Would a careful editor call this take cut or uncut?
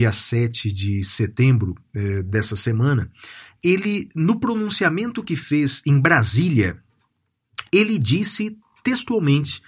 uncut